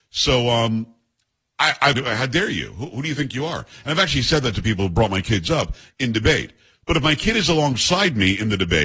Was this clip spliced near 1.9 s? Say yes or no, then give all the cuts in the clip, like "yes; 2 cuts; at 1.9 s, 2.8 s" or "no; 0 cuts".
yes; 1 cut; at 1.9 s